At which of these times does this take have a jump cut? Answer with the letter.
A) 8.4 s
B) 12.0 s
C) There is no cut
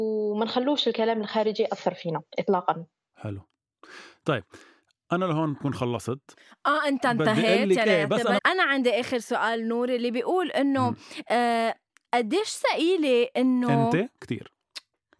A